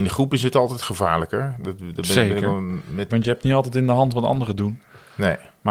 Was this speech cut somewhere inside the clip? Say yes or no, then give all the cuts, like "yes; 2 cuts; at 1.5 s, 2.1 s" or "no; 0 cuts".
yes; 1 cut; at 3.1 s